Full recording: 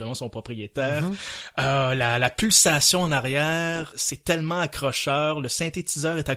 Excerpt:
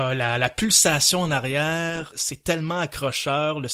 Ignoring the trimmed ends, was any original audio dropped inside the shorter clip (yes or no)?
no